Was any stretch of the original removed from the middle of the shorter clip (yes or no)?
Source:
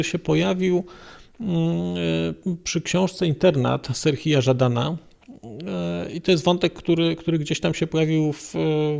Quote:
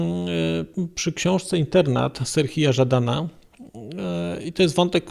no